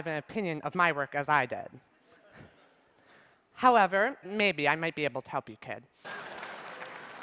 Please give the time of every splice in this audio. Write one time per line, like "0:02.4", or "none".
0:04.2
0:06.0